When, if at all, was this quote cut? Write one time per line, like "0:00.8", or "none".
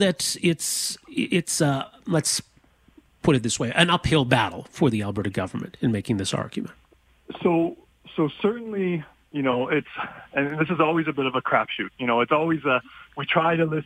none